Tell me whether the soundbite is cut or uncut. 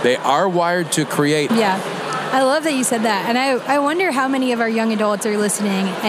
cut